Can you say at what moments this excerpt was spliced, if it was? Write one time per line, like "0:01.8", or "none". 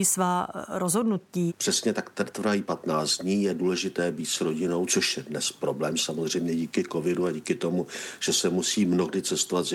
0:01.5